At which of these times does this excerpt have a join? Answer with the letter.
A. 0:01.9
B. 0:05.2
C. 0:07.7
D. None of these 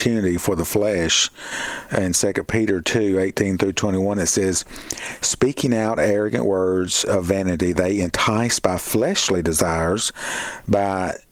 A